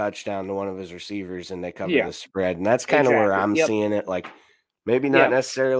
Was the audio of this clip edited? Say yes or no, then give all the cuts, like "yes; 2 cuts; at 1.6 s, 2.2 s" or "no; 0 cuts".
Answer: no; 0 cuts